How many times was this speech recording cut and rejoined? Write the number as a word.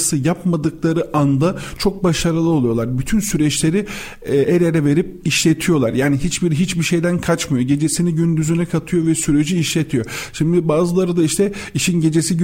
zero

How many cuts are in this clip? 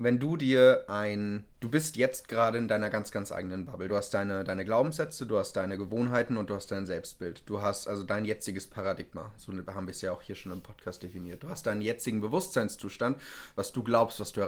zero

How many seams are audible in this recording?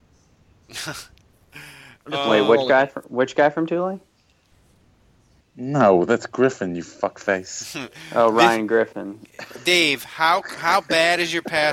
one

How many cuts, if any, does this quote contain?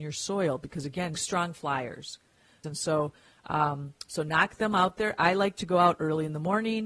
two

